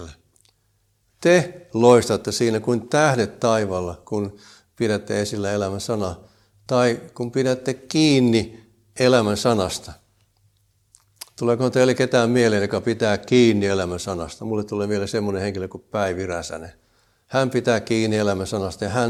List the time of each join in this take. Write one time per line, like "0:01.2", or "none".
none

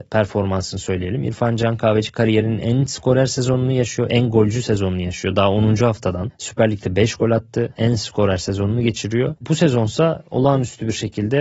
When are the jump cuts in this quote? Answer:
0:07.8
0:09.4

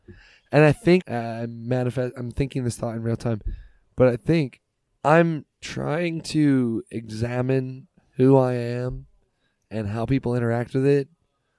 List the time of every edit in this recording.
0:01.0
0:05.5

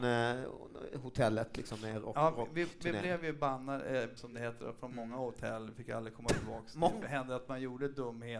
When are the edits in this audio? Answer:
0:04.2
0:07.0

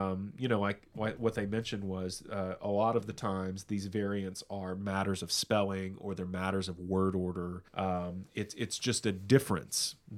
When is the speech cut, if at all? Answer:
0:07.7

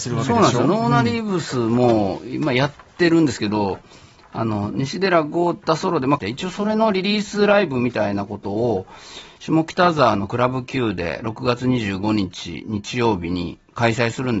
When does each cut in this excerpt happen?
0:06.2

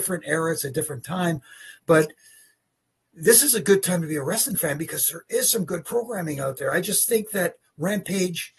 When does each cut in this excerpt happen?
none

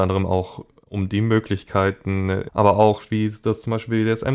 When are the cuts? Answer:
0:02.5

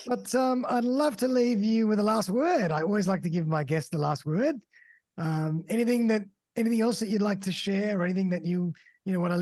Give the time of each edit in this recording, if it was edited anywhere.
none

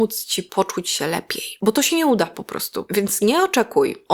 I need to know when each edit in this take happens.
none

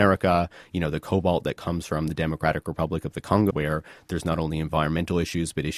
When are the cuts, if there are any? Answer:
0:03.5

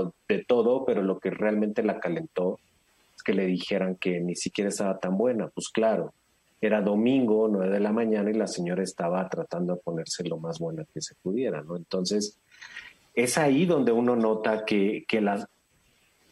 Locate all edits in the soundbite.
none

